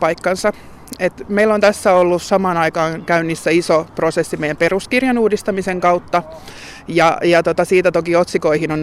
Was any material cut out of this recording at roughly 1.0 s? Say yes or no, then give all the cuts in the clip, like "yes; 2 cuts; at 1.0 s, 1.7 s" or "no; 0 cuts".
no; 0 cuts